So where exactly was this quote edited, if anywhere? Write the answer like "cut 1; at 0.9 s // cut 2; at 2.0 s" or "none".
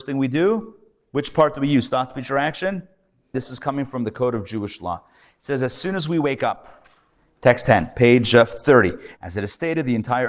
cut 1; at 3.3 s // cut 2; at 9.2 s